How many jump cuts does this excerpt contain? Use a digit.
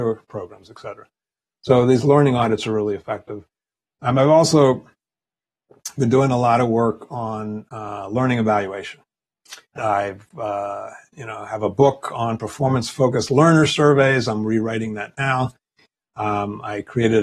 1